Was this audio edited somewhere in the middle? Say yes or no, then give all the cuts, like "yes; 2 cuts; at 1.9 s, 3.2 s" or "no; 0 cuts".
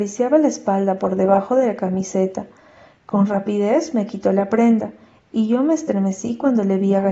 no; 0 cuts